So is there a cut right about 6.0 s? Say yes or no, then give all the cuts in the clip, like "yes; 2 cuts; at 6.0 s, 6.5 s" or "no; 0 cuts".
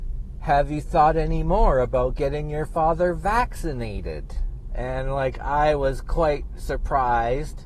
no; 1 cut; at 4.7 s